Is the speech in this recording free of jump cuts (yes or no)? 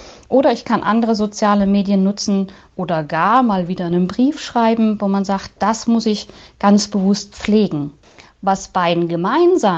yes